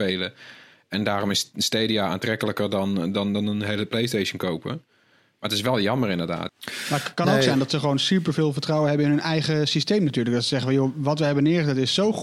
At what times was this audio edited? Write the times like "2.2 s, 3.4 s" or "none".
6.5 s